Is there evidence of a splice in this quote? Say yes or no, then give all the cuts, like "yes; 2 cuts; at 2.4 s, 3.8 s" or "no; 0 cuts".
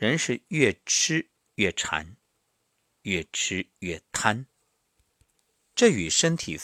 no; 0 cuts